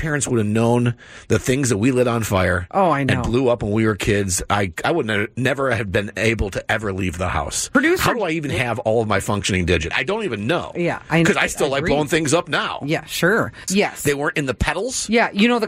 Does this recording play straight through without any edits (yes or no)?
no